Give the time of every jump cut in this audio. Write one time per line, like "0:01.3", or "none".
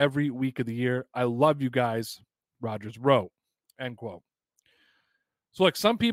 none